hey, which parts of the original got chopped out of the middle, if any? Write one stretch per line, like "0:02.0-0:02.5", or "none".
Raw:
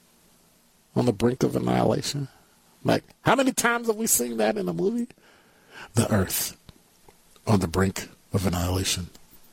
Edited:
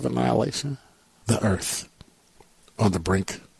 0:02.7-0:05.9